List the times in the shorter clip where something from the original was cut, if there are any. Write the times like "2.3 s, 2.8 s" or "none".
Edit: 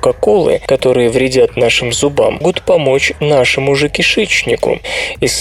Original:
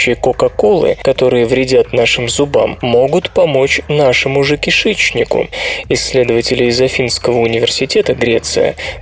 2.4 s